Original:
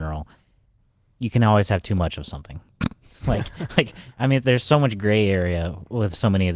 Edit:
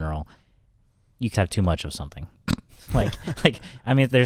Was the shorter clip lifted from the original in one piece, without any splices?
no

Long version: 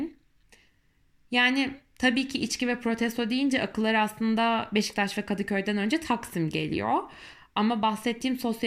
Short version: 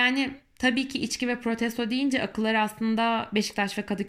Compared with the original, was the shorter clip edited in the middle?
no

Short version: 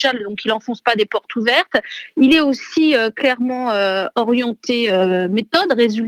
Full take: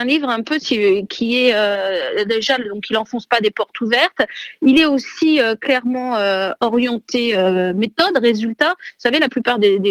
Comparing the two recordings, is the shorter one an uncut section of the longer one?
yes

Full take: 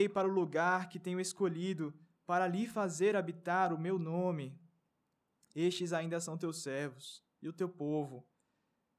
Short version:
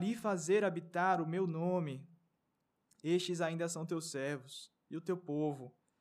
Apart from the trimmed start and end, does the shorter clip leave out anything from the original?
no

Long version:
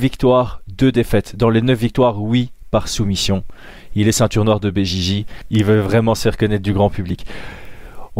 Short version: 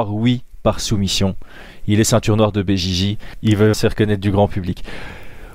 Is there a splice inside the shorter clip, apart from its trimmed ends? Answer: yes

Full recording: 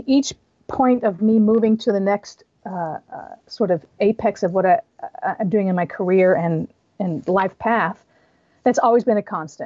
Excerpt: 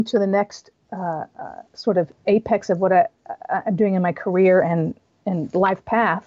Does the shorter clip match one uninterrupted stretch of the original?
yes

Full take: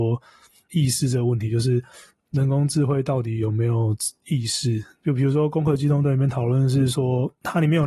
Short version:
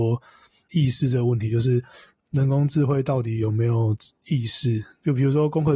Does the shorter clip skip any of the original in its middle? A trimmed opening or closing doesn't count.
no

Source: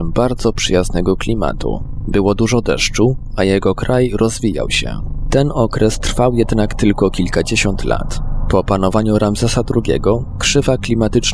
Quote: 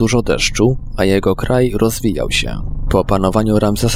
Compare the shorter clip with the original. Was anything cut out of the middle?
yes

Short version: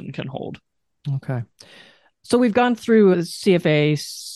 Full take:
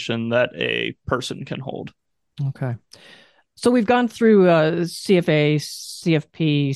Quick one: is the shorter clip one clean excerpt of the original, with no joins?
no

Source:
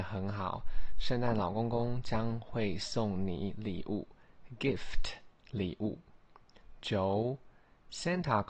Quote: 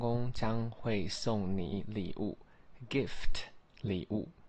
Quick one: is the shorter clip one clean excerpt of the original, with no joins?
yes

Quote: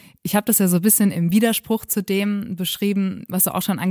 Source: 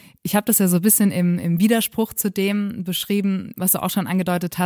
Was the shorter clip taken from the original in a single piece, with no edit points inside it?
no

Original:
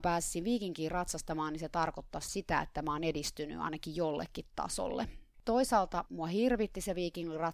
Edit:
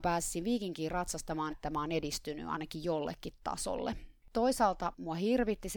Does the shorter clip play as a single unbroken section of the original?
no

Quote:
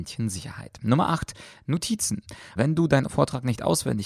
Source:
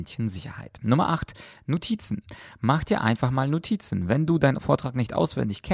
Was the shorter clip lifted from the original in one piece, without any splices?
no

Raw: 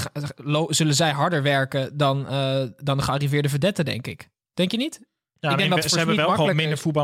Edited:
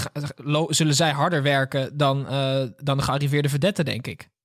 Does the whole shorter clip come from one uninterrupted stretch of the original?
yes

